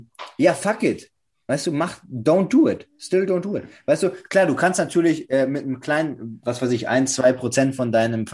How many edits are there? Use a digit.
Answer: 0